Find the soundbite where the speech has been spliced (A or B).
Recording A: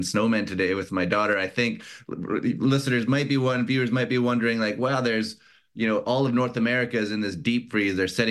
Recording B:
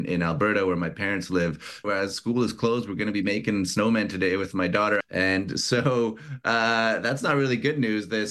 B